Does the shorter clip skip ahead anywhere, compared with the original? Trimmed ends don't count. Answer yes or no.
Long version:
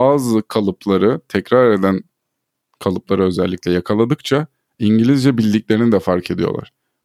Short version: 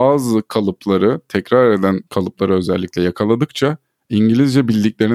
yes